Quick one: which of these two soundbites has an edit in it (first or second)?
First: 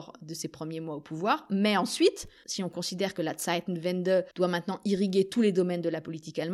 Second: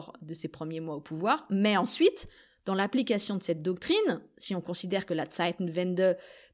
first